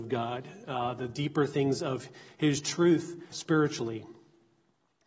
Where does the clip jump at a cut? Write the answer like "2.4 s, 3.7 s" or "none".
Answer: 3.3 s